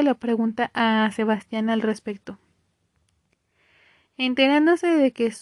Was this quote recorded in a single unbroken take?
yes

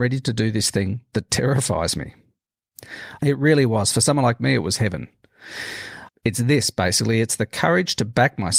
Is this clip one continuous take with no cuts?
no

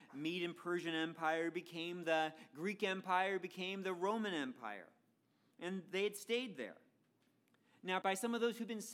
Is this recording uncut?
no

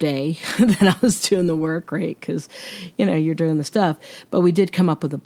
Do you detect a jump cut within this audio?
no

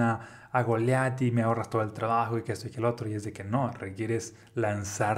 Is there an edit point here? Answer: no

